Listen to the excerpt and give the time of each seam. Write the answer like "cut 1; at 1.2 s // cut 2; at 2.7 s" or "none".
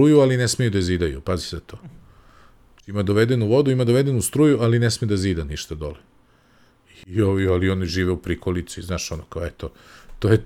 none